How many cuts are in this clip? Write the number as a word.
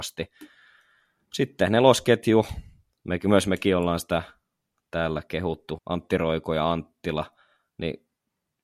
one